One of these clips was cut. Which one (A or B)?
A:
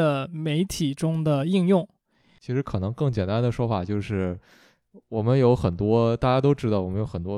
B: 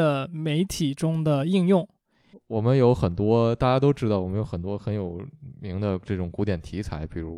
B